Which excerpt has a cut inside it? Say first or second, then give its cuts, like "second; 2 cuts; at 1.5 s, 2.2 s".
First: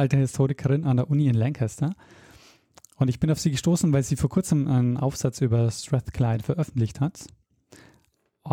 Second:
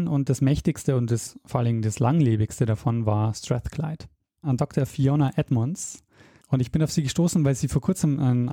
second; 2 cuts; at 4.4 s, 6.4 s